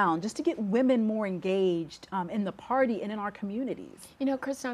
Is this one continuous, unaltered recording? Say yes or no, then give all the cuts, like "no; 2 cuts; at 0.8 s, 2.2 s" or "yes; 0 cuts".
yes; 0 cuts